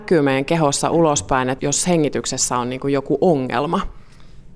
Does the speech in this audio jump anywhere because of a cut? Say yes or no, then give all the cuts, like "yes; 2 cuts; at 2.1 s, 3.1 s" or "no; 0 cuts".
yes; 1 cut; at 1.6 s